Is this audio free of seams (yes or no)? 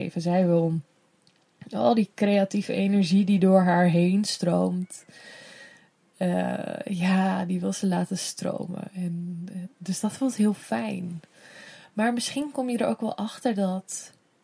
yes